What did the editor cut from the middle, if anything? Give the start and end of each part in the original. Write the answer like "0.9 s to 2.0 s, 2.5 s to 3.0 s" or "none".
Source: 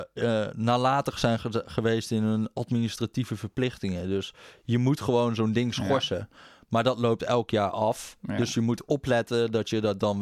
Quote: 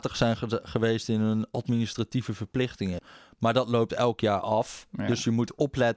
4.0 s to 6.3 s